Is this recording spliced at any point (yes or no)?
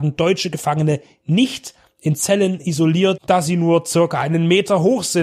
yes